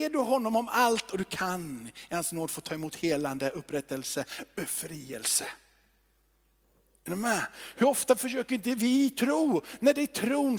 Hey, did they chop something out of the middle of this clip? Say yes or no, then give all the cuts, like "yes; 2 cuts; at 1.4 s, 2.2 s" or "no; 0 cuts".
no; 0 cuts